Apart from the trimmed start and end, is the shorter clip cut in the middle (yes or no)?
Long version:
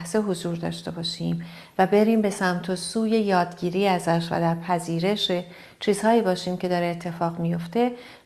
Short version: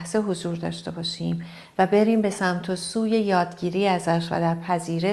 no